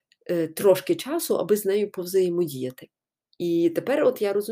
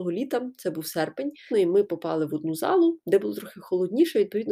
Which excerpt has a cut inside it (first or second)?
second